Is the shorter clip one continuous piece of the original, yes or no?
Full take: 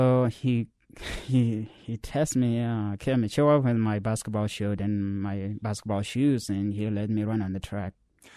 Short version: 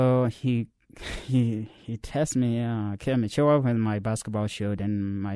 yes